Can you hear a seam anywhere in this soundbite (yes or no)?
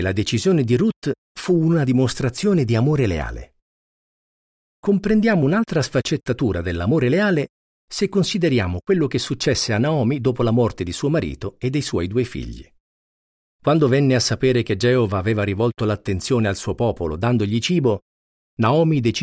no